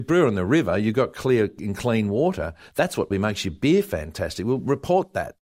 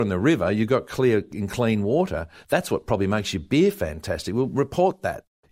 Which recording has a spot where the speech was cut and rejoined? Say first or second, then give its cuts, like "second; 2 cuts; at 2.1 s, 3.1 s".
first; 1 cut; at 3.1 s